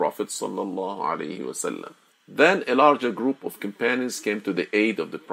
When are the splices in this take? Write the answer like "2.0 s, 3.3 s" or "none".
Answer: 2.1 s

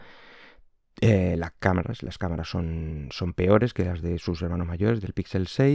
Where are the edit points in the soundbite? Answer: none

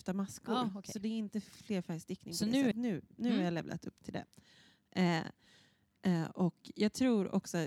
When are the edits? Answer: 2.7 s

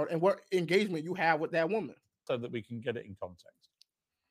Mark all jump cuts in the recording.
2.3 s

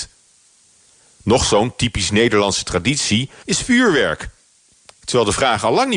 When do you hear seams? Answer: 3.4 s

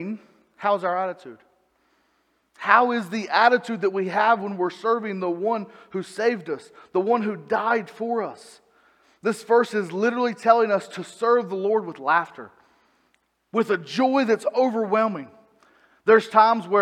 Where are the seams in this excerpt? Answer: none

